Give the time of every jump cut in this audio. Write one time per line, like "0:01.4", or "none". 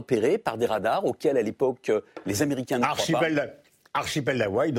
none